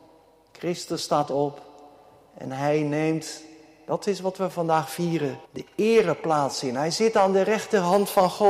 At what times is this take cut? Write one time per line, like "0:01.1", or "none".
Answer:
0:05.4